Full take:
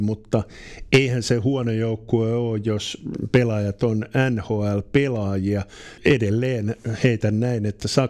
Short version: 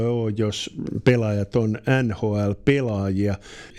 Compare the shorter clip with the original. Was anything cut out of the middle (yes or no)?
no